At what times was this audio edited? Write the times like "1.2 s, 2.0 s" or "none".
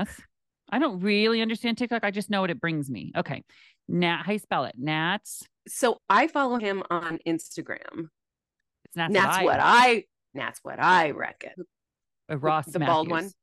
8.7 s, 11.5 s